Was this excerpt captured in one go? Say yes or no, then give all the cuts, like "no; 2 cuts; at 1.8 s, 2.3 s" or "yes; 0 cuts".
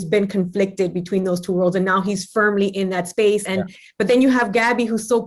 yes; 0 cuts